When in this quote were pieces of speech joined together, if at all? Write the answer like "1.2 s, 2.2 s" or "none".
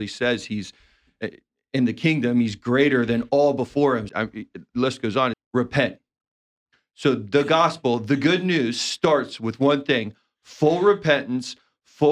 4.1 s, 5.3 s